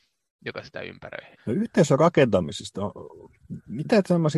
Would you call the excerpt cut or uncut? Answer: cut